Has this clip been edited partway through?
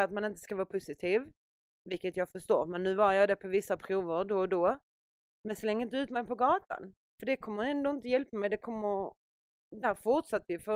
no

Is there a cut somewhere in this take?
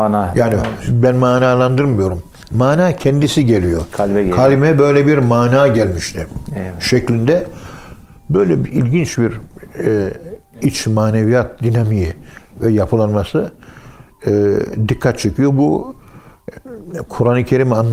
no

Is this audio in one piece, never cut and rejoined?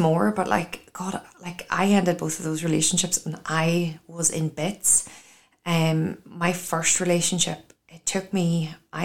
yes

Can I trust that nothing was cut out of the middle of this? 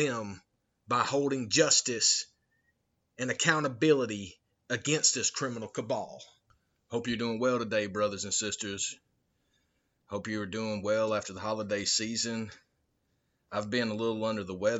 yes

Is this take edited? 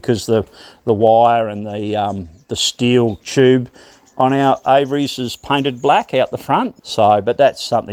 yes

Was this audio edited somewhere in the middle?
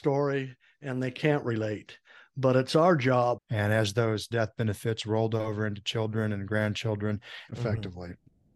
yes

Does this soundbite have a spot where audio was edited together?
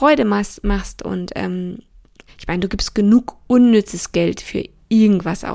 yes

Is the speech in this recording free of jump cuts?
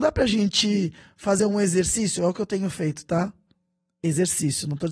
yes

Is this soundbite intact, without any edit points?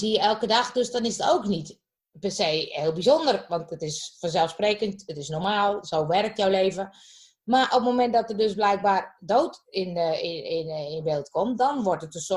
yes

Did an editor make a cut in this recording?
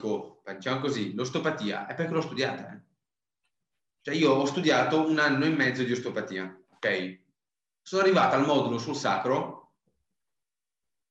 no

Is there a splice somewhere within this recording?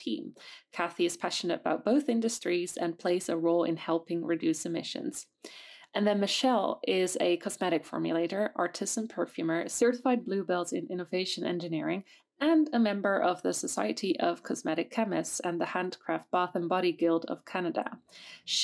no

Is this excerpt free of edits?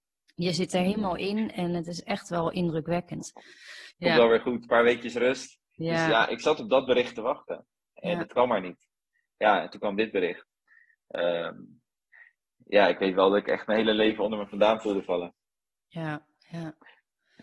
no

